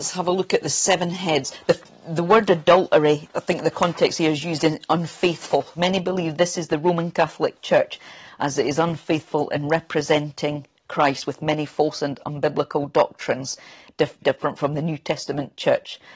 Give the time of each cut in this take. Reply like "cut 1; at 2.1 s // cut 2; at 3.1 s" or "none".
cut 1; at 5.7 s // cut 2; at 14.2 s